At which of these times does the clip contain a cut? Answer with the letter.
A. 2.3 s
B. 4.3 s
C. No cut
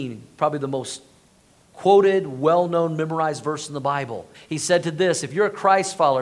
B